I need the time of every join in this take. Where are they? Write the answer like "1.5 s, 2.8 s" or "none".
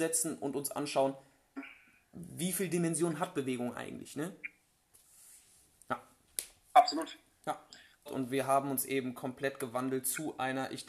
8.1 s